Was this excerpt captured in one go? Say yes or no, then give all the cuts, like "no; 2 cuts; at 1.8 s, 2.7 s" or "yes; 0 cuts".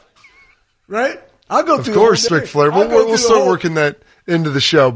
no; 1 cut; at 2.3 s